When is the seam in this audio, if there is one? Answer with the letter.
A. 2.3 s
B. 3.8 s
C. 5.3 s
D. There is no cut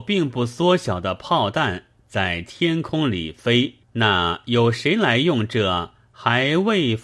B